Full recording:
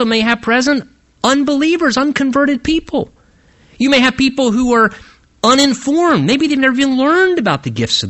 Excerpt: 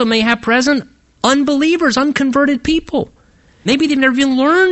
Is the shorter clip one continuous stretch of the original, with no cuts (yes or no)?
no